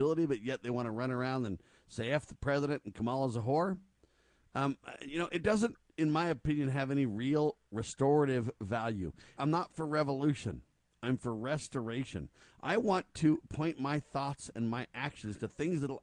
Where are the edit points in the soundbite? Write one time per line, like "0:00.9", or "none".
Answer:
0:09.4